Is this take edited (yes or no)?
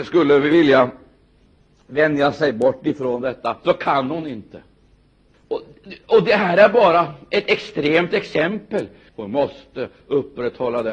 yes